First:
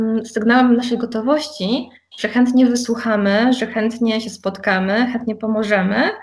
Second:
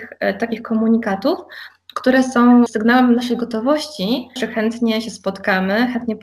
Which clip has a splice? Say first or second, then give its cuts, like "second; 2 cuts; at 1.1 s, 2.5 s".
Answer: second; 2 cuts; at 2.7 s, 4.4 s